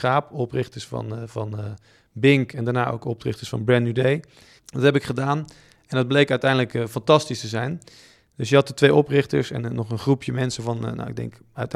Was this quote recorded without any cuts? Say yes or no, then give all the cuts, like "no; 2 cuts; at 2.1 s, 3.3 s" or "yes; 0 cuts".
no; 1 cut; at 4.6 s